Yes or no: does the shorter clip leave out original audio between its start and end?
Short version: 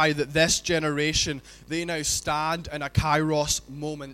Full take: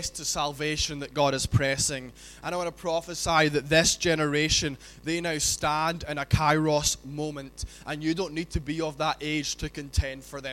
no